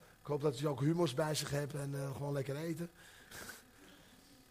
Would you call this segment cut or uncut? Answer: uncut